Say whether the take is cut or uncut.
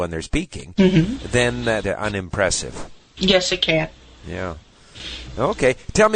cut